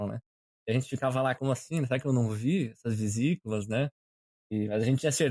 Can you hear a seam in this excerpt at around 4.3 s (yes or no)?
no